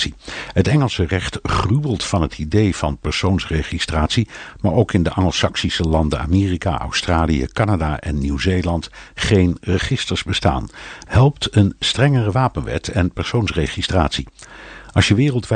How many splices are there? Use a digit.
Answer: 2